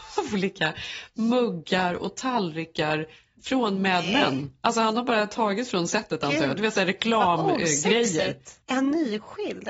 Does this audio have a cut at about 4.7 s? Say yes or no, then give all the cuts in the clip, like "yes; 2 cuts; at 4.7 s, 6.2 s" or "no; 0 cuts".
no; 1 cut; at 8.6 s